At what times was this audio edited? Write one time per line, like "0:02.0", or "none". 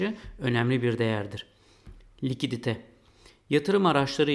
none